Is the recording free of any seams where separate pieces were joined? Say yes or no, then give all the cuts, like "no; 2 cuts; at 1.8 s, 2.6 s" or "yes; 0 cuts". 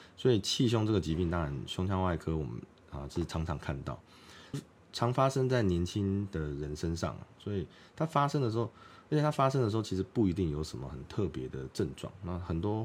no; 1 cut; at 4.5 s